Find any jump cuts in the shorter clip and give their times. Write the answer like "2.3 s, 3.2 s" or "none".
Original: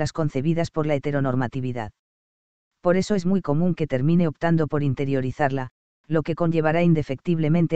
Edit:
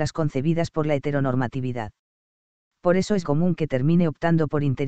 3.2 s